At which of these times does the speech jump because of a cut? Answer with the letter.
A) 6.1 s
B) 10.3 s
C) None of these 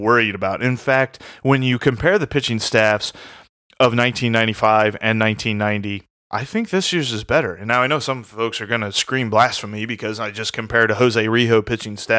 A